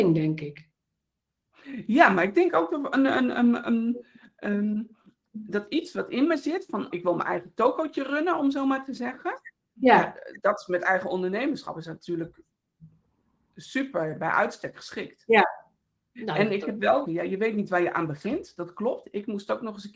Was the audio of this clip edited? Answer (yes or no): yes